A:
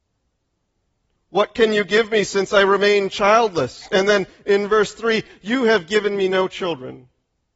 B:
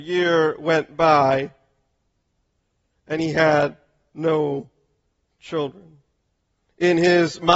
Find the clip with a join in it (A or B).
A